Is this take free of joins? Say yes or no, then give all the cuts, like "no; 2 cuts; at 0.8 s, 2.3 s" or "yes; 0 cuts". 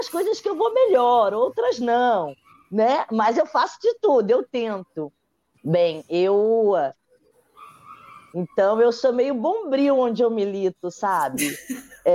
no; 2 cuts; at 5.6 s, 8.3 s